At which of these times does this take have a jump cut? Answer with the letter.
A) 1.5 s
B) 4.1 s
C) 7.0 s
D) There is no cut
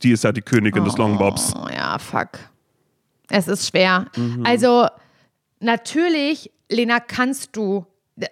B